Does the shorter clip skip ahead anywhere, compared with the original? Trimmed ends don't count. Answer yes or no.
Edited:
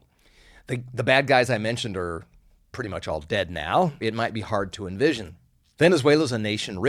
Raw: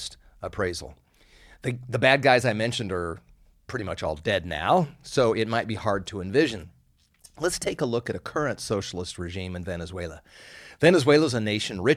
yes